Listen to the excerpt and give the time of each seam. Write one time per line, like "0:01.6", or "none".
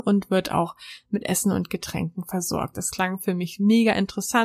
0:02.7